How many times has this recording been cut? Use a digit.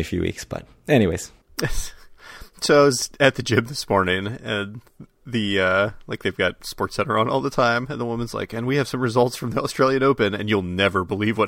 0